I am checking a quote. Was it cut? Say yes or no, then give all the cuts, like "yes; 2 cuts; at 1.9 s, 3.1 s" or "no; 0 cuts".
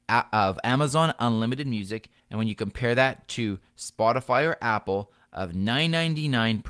yes; 1 cut; at 2.2 s